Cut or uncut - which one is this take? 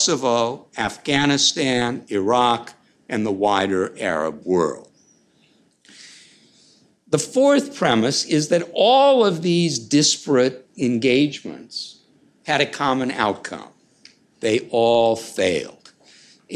uncut